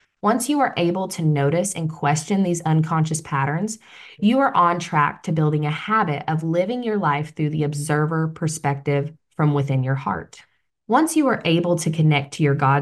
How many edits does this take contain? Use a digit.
1